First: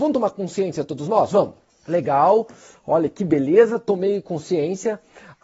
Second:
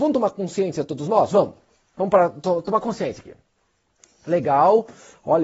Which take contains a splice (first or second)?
first